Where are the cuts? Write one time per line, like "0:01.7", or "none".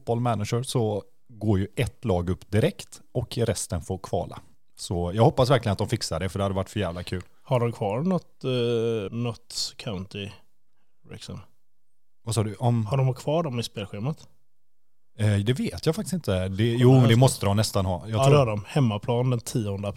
0:09.1